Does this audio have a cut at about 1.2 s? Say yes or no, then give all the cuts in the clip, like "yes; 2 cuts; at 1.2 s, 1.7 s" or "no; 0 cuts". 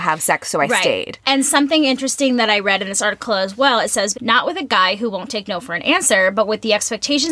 no; 1 cut; at 4.1 s